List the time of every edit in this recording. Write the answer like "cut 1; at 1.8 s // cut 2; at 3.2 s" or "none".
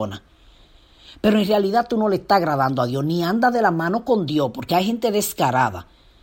none